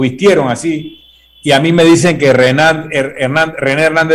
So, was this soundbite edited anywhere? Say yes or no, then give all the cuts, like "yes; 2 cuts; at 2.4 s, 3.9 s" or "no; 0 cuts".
no; 0 cuts